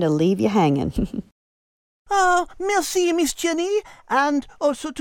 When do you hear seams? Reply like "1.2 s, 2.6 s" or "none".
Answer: none